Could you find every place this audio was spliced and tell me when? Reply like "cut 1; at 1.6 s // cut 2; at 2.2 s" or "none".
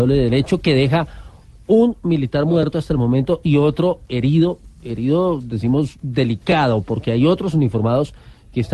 none